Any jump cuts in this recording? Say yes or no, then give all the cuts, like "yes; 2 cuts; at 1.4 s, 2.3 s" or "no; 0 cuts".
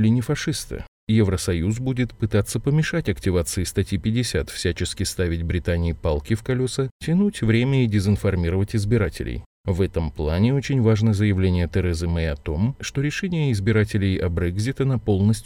no; 0 cuts